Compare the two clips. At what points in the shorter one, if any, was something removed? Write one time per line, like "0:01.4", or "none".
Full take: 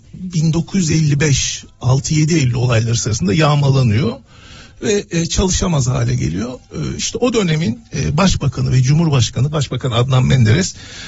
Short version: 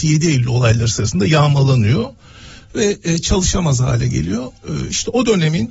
none